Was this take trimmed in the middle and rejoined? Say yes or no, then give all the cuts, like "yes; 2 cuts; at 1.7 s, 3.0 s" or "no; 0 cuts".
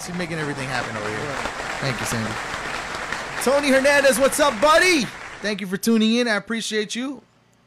no; 0 cuts